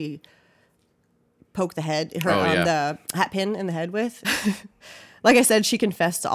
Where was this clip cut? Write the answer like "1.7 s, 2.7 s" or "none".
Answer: 4.2 s